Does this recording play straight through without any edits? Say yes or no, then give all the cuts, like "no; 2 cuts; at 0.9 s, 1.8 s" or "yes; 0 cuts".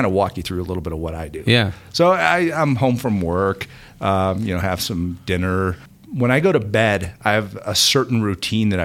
yes; 0 cuts